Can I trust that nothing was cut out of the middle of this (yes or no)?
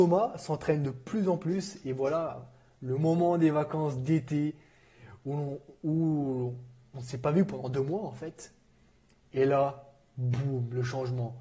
yes